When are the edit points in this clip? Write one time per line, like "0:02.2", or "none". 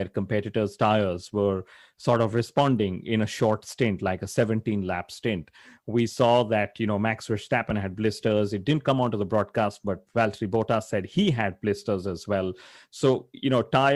none